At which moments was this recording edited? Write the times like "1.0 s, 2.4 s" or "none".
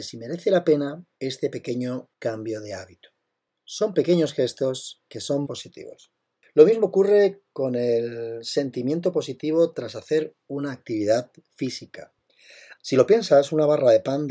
5.4 s, 12.8 s